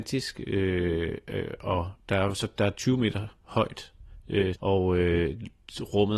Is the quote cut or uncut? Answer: cut